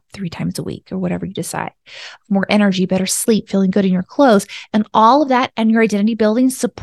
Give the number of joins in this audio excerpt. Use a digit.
0